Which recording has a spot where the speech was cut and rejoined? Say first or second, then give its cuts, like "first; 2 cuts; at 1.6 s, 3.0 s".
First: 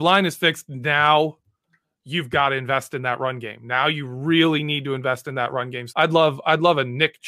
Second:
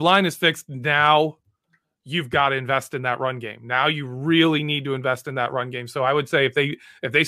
first; 1 cut; at 5.9 s